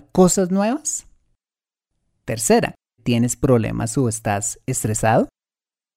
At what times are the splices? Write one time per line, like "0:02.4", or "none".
0:03.0

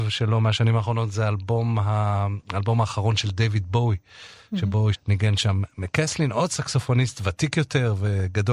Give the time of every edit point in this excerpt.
0:04.9

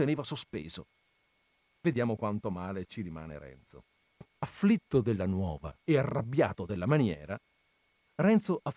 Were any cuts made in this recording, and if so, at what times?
0:01.6
0:04.3
0:05.8

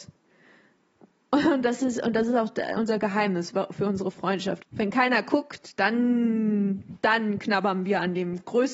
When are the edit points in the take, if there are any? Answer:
0:04.6
0:05.8

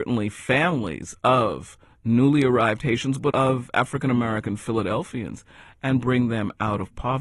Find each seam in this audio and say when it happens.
0:03.3

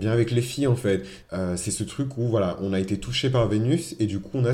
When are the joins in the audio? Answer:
0:01.2

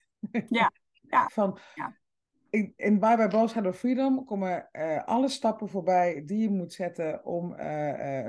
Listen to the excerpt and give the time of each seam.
0:01.3

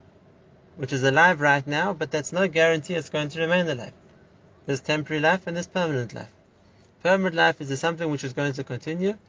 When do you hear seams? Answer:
none

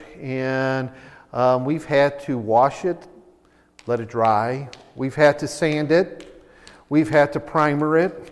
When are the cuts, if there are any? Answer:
none

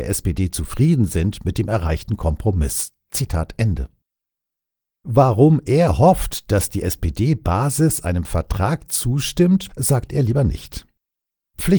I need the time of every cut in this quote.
0:09.7

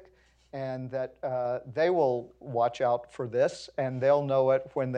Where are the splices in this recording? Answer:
none

